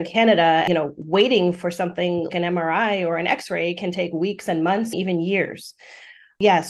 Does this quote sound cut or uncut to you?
cut